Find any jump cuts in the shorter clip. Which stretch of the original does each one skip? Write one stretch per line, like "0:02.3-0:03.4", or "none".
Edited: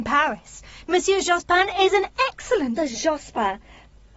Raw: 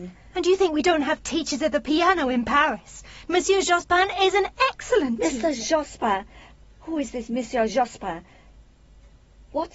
0:05.2-0:05.4